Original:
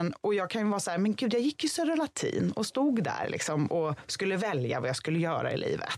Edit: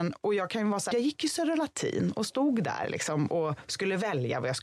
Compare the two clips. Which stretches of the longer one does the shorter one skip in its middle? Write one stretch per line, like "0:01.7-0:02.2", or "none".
0:00.9-0:01.3